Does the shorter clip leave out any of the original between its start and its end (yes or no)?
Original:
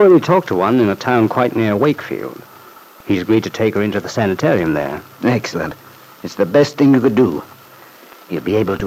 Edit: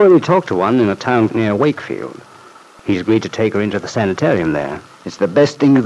yes